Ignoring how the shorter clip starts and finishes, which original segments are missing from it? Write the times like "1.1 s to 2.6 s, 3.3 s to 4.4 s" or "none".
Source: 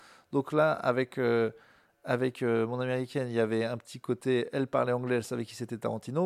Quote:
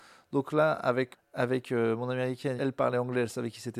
1.1 s to 1.8 s, 3.3 s to 4.5 s